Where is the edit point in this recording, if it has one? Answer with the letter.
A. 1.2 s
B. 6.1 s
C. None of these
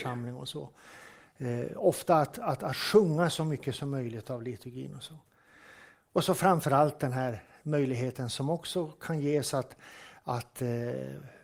C